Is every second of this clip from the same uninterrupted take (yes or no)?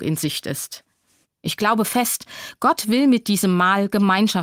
no